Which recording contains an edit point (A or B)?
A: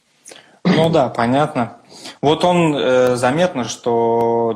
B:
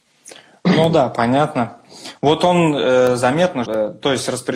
B